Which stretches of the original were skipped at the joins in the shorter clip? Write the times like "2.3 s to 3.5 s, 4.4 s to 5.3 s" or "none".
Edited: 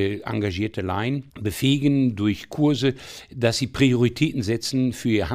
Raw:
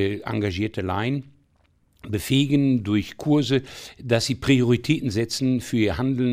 1.3 s to 2.0 s